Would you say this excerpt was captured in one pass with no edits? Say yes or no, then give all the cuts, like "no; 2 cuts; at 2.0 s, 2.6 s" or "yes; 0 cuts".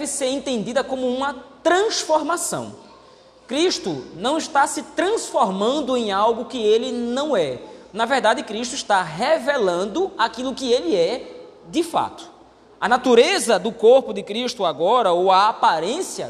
yes; 0 cuts